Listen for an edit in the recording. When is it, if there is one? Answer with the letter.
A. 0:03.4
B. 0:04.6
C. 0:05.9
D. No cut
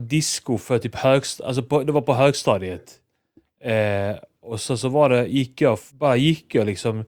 C